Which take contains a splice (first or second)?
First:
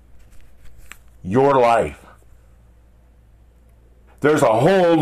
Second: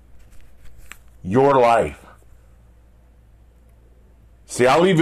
first